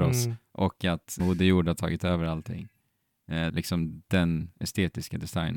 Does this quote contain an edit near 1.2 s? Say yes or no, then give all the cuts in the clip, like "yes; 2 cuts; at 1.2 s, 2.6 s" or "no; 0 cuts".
yes; 2 cuts; at 1.2 s, 3.5 s